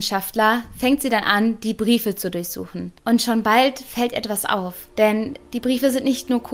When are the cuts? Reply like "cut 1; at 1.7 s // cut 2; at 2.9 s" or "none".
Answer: cut 1; at 3.0 s // cut 2; at 4.9 s